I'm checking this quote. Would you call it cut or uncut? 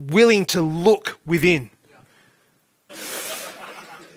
cut